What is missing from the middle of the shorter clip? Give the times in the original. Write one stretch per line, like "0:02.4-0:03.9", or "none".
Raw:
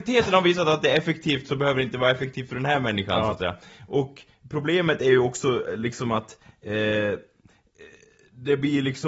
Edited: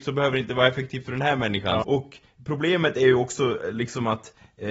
0:03.3-0:03.9